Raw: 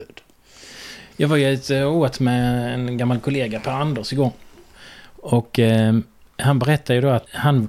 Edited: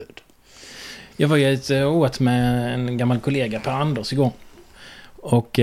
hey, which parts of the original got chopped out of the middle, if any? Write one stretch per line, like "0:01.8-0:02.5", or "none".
none